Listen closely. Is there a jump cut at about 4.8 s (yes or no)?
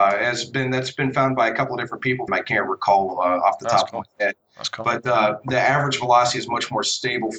no